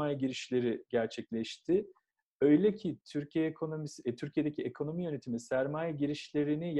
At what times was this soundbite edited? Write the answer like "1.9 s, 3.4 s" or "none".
none